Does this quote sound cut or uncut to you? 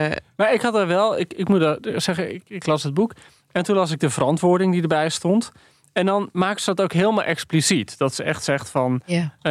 uncut